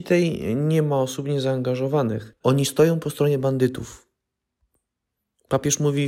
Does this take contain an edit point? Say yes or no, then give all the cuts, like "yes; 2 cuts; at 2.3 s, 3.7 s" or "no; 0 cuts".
yes; 1 cut; at 2.4 s